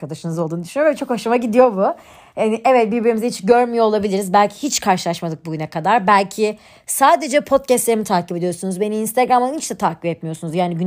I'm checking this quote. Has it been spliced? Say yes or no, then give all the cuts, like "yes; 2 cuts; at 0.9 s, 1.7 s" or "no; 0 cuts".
no; 0 cuts